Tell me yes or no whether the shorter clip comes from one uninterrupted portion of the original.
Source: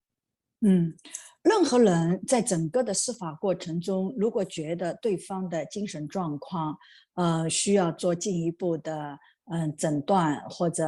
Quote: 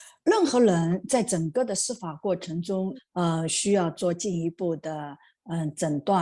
no